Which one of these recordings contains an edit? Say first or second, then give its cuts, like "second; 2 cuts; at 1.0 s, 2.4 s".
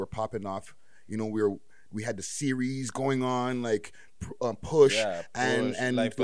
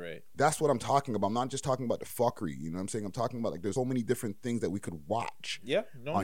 second; 1 cut; at 3.8 s